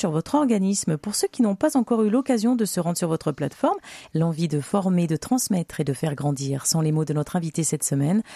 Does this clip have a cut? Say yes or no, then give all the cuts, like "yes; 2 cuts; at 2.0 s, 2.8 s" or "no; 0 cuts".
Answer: yes; 1 cut; at 4.1 s